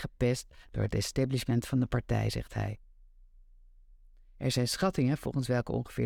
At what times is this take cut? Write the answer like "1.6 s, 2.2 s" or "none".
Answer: none